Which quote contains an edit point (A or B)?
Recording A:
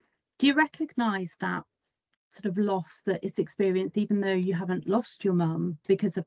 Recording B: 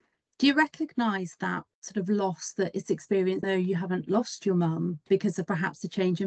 B